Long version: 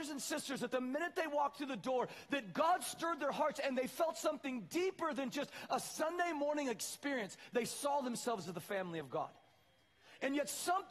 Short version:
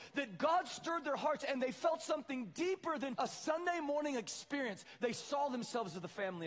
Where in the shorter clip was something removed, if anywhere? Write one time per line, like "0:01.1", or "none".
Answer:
0:03.1